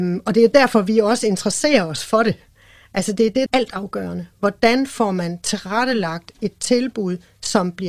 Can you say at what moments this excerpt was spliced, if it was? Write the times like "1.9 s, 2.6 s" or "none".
3.5 s